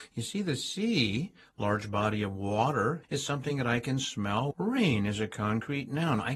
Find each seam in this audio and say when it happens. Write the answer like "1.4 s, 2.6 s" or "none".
3.0 s, 4.5 s